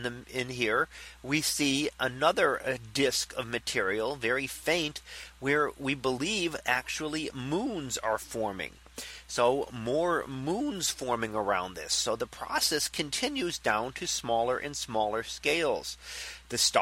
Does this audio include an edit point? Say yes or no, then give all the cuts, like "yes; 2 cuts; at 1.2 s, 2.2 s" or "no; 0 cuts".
no; 0 cuts